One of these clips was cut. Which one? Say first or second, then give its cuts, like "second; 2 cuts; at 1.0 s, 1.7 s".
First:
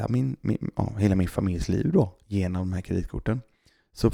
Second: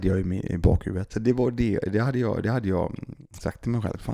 second; 1 cut; at 1.1 s